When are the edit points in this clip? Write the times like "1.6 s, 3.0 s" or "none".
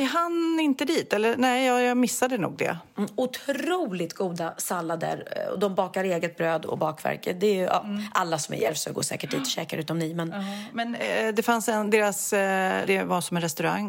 12.9 s